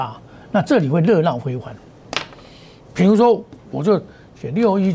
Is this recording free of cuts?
no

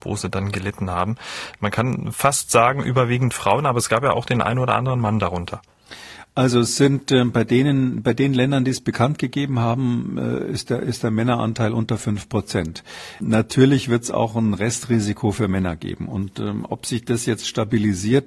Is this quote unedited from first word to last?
yes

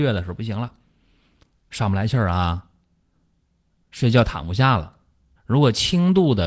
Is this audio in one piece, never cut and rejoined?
no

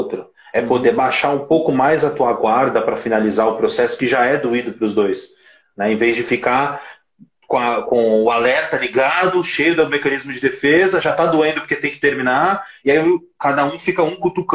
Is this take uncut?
yes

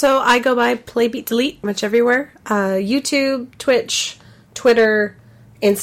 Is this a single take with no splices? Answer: no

